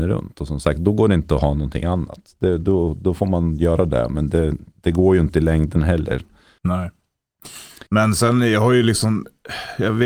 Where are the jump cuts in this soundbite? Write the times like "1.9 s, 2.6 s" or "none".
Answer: 6.6 s, 7.9 s